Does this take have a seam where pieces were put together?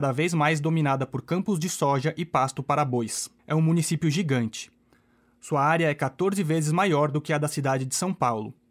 yes; 1 cut; at 3.4 s

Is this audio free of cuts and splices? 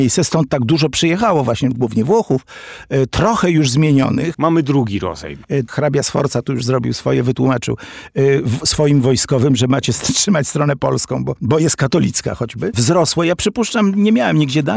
no; 2 cuts; at 4.3 s, 5.7 s

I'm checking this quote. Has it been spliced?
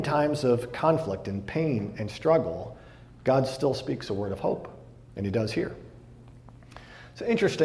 no; 0 cuts

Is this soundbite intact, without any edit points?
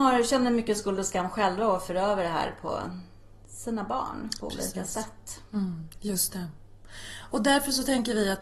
yes; 0 cuts

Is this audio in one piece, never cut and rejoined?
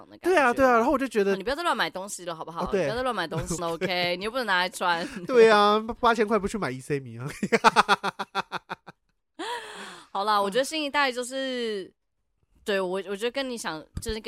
no; 1 cut; at 3.6 s

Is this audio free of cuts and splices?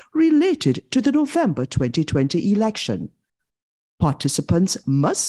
yes; 0 cuts

